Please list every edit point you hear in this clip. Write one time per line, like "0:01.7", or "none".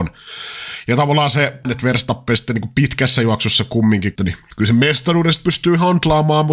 0:01.6
0:04.2